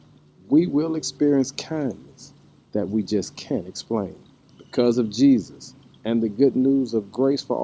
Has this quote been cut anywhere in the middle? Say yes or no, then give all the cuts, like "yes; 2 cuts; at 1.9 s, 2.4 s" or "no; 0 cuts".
yes; 1 cut; at 4.5 s